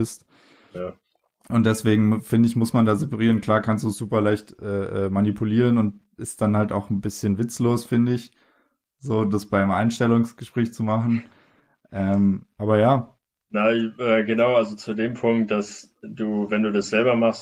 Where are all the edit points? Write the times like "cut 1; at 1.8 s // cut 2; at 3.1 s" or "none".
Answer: none

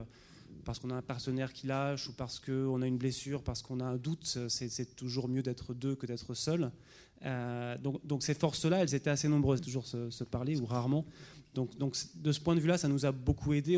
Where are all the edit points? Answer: cut 1; at 9.6 s

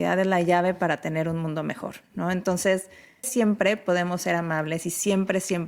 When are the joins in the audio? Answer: cut 1; at 3.2 s

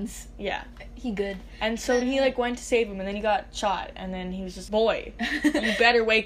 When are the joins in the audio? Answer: cut 1; at 2.0 s // cut 2; at 4.7 s

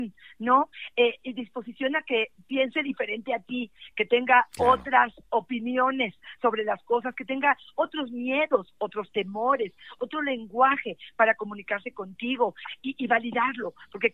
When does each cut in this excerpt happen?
cut 1; at 10.0 s // cut 2; at 12.8 s

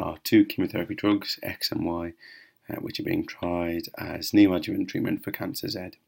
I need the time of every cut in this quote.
none

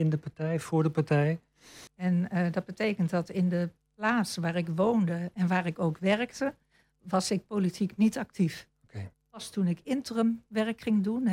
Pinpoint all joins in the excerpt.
cut 1; at 1.9 s // cut 2; at 9.1 s

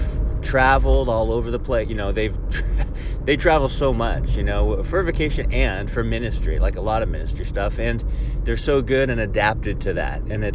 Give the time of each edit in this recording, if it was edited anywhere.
none

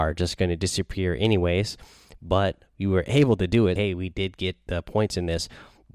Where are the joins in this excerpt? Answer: cut 1; at 3.8 s

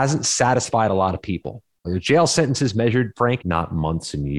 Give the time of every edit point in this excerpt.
cut 1; at 1.8 s // cut 2; at 3.4 s

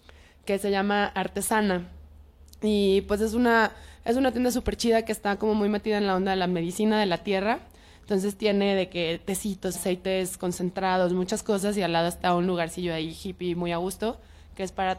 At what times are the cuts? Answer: cut 1; at 9.7 s

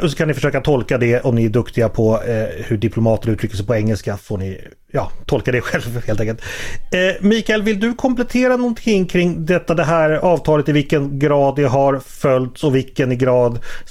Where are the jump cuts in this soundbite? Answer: none

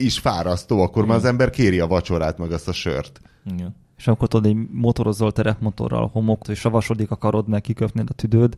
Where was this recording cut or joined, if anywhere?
cut 1; at 6.4 s

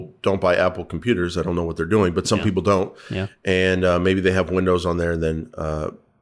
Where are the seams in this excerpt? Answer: none

